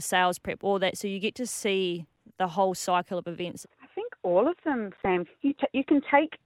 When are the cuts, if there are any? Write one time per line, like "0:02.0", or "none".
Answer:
0:03.6
0:05.2